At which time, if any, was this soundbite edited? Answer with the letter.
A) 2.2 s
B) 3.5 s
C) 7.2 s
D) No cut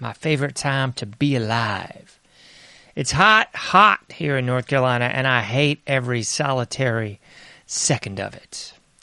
B